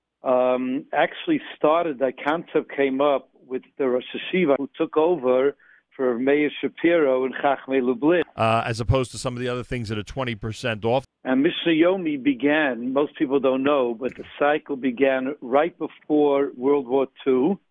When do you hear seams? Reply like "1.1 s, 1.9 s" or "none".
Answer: 4.6 s, 8.2 s, 11.0 s